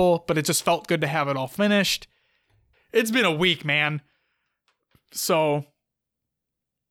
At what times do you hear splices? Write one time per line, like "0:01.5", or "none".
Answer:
0:02.7